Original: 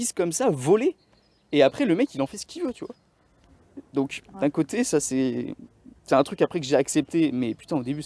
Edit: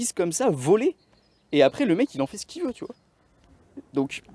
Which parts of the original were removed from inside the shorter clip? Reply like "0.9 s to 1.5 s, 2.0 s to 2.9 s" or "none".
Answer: none